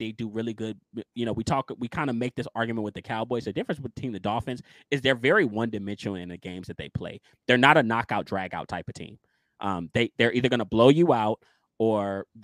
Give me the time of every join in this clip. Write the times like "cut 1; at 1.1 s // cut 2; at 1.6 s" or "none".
none